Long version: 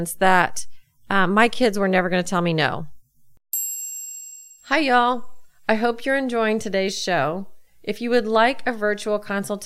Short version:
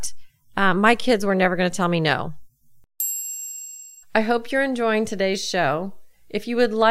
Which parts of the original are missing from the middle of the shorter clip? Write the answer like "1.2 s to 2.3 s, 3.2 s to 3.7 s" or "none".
4.6 s to 5.6 s